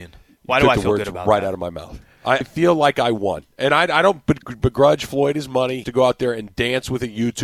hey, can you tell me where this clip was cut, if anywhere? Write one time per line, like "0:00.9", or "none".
0:02.4
0:05.8